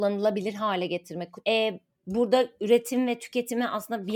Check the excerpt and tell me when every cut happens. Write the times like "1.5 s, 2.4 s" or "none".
1.4 s